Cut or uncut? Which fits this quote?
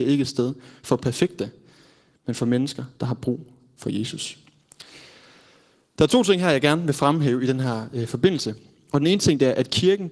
uncut